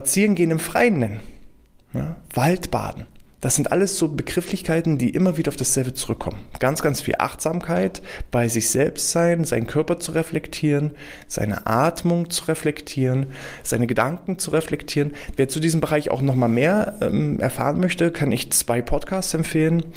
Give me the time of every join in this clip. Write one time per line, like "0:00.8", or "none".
0:15.4

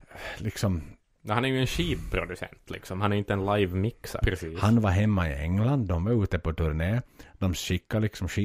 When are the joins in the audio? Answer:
0:04.2

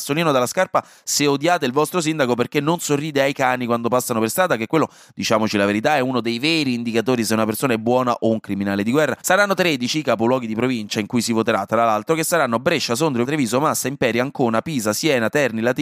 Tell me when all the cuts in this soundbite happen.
0:09.2
0:13.3

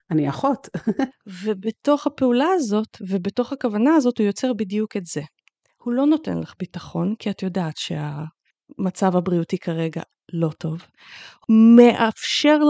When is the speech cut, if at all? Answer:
0:01.1

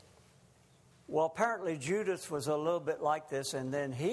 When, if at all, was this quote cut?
0:00.9

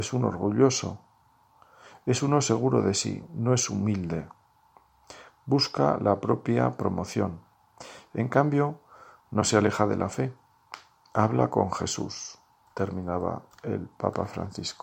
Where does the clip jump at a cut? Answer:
0:09.2

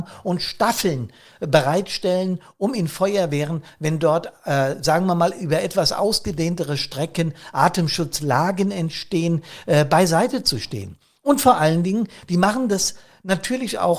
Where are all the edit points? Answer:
none

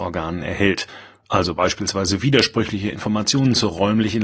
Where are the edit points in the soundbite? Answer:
none

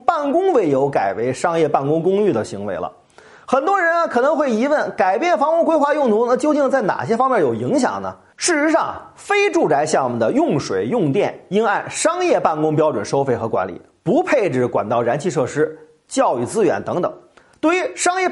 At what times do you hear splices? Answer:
none

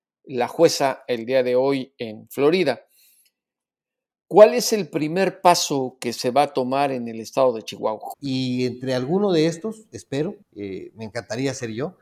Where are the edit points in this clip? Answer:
0:08.1
0:10.4

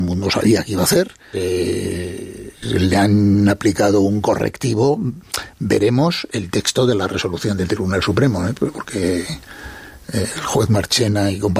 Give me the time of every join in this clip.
0:01.3

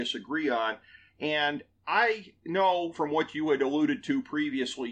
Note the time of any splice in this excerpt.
0:02.9

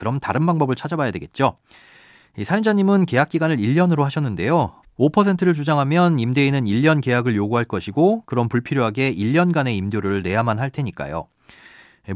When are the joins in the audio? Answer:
0:04.8

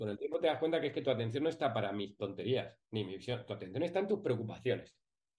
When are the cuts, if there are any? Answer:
none

